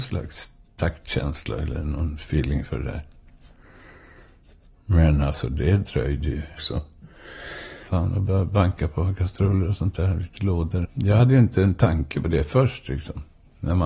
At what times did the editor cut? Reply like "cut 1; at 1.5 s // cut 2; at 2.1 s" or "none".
cut 1; at 6.6 s // cut 2; at 7.9 s // cut 3; at 10.8 s